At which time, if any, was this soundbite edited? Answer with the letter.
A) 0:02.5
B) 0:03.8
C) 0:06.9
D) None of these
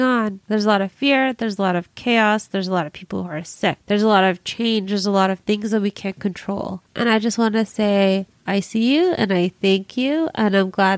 C